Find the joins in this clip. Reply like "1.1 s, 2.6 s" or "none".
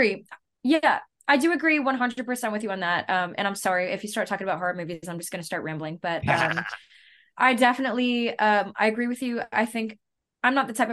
none